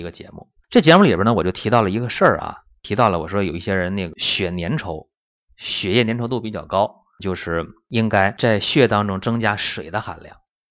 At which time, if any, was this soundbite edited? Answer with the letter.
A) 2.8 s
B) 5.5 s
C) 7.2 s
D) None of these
C